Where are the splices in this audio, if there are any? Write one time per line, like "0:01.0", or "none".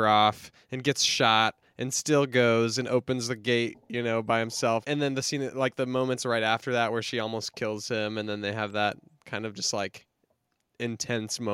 none